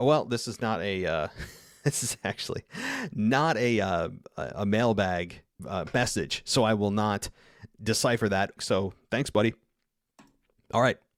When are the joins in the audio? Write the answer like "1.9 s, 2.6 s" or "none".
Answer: 5.6 s, 8.6 s